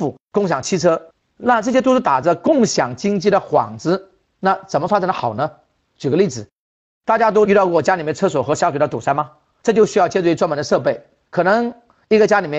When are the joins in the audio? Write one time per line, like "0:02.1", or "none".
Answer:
none

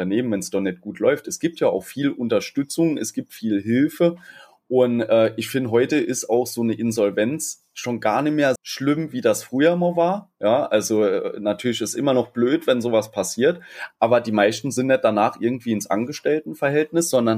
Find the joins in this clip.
0:08.6
0:13.9

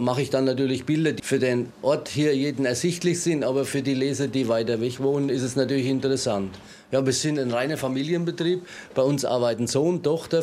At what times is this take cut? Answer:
0:01.2

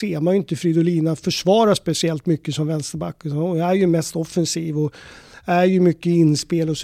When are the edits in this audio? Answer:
none

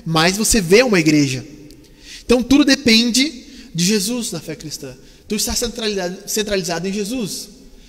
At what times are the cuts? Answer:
none

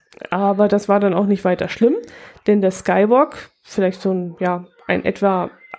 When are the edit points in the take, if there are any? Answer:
none

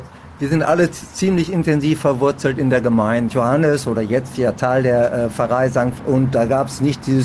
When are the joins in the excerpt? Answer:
0:03.3
0:06.0

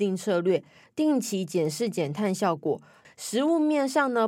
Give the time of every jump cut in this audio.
0:03.0

